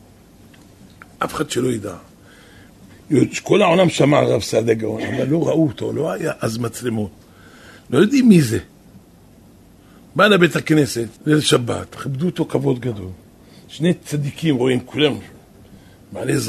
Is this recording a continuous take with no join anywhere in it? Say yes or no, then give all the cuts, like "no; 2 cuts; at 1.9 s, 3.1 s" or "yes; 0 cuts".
no; 1 cut; at 11.2 s